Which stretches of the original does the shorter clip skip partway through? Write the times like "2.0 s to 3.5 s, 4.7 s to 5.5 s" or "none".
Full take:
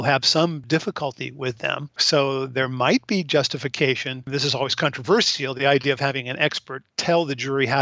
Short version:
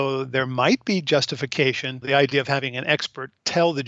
4.2 s to 5.5 s